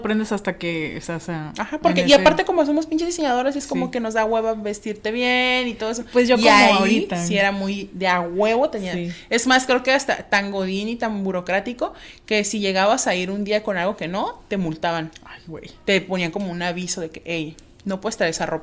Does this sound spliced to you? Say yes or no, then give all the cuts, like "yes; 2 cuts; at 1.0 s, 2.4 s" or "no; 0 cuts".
no; 0 cuts